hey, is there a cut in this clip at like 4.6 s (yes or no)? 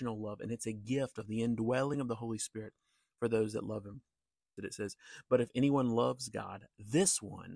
yes